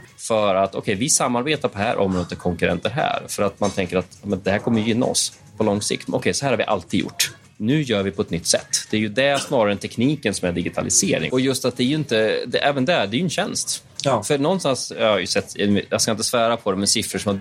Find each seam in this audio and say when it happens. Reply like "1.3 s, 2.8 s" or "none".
6.1 s, 11.3 s